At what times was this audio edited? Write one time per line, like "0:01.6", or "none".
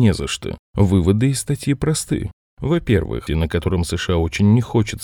0:03.3